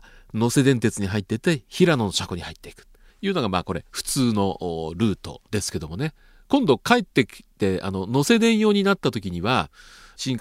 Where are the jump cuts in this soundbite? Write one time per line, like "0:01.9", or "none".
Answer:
0:03.1
0:05.5